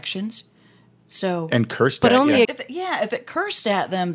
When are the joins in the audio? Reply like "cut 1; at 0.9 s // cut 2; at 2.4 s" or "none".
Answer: cut 1; at 2.4 s